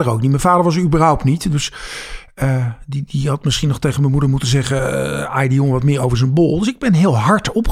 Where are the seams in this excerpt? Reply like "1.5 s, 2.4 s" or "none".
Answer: none